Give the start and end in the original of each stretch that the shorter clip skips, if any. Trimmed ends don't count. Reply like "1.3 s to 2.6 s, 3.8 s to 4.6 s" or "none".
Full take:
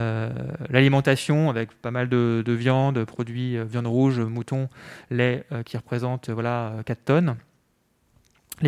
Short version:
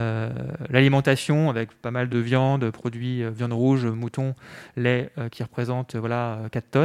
2.1 s to 2.4 s